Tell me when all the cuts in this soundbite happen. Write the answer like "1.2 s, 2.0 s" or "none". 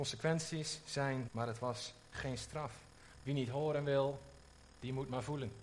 1.3 s, 3.1 s